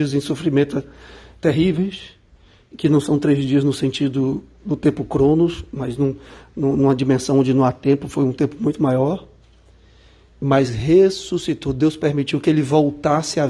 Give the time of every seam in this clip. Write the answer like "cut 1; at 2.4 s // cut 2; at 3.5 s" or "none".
none